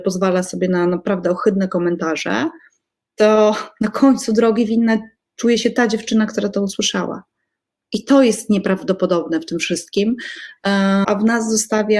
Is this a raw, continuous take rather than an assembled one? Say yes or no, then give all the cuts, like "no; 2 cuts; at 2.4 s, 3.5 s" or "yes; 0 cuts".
no; 1 cut; at 11.0 s